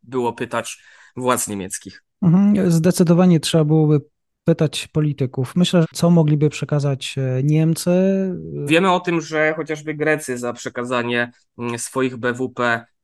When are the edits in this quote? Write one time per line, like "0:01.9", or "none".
0:05.8
0:08.7